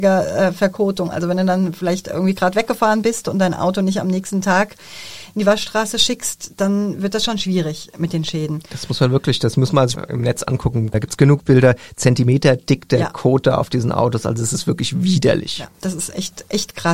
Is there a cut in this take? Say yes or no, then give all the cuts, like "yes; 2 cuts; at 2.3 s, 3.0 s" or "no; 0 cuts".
no; 0 cuts